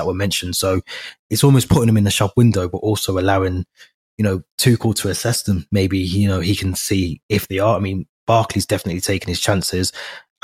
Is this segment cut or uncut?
uncut